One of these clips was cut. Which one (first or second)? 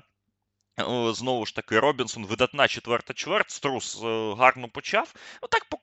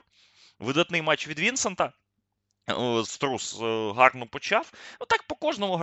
second